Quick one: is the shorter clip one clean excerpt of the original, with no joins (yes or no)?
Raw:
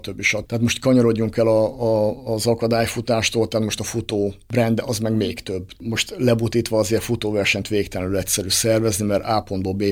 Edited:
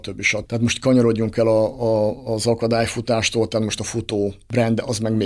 yes